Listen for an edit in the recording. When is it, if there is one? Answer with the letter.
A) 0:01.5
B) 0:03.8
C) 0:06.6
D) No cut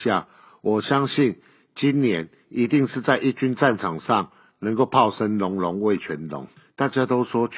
C